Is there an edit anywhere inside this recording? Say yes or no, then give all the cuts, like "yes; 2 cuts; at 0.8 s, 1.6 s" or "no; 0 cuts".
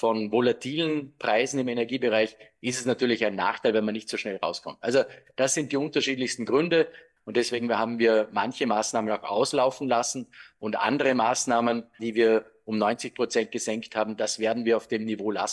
yes; 2 cuts; at 7.2 s, 12.0 s